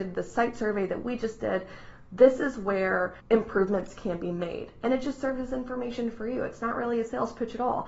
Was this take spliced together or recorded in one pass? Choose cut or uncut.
cut